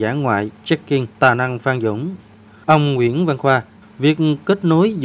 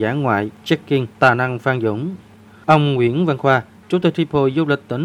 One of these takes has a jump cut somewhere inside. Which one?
first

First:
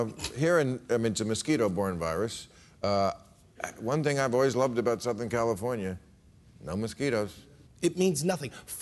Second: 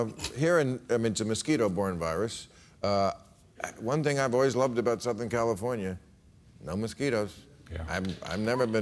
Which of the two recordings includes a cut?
first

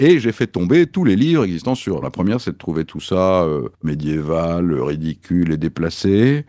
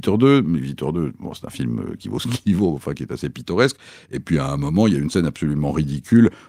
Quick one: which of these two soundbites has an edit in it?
first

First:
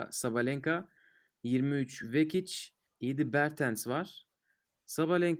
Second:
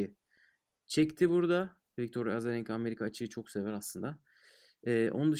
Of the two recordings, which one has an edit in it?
first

